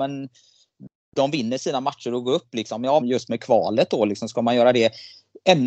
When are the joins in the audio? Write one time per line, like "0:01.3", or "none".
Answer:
0:03.0